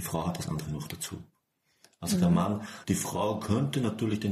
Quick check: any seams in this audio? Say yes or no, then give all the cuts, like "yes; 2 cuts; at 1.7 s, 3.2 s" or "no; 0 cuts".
yes; 1 cut; at 2.8 s